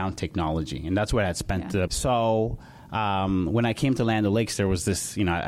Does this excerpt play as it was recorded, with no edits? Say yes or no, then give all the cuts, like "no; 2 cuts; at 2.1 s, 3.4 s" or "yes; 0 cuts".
no; 1 cut; at 1.9 s